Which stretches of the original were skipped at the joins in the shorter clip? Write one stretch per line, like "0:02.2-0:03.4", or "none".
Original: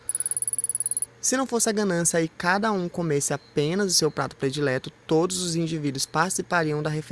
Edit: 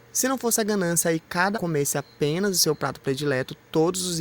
0:02.6-0:02.9